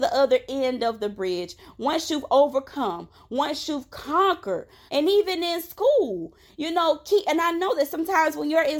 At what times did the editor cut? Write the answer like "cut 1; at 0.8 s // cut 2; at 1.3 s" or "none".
cut 1; at 4.9 s